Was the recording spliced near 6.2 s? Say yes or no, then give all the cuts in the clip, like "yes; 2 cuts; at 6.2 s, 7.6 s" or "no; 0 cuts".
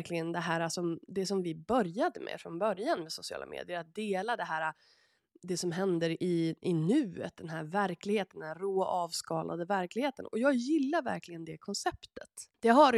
no; 0 cuts